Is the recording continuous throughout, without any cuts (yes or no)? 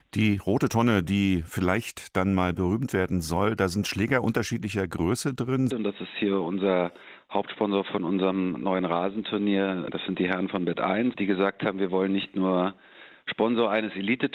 no